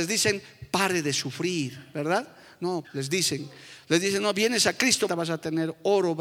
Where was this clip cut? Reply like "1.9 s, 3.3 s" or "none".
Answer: 2.8 s, 5.1 s

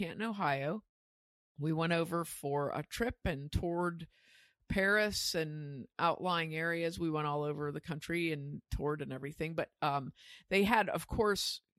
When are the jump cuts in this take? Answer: none

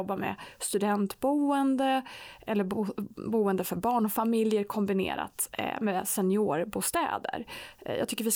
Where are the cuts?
none

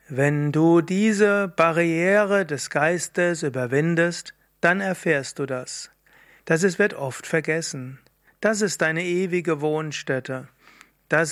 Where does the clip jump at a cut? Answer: 6.4 s, 8.3 s

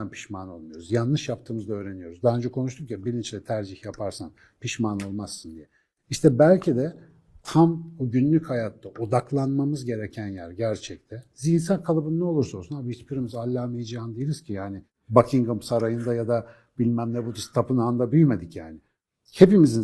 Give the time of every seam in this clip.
none

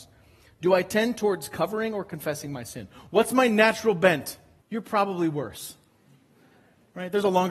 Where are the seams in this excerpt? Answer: 4.6 s

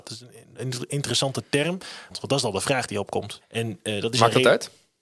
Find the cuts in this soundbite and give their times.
2.1 s, 3.4 s

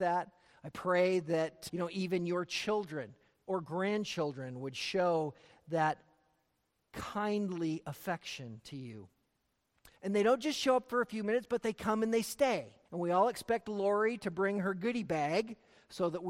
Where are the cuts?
1.7 s, 10.0 s, 12.8 s

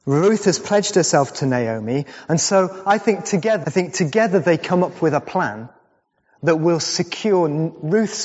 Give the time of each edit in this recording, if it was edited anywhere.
3.6 s

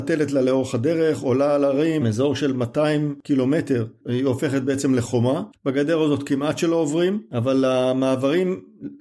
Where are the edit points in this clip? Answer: 2.0 s

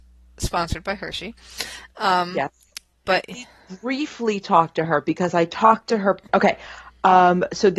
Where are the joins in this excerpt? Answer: 3.1 s, 6.3 s

